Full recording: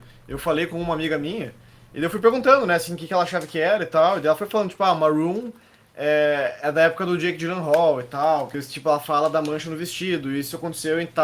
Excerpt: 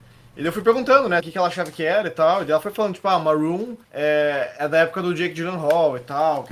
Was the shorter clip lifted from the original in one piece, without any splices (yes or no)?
no